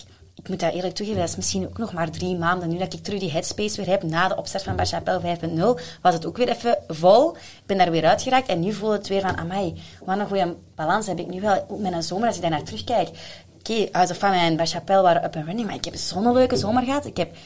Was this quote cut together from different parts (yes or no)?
no